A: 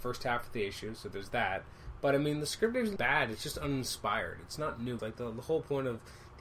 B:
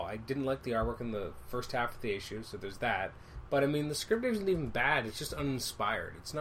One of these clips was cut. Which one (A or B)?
A